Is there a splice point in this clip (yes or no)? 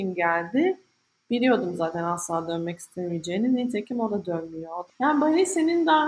yes